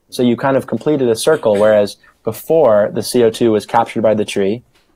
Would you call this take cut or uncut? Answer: uncut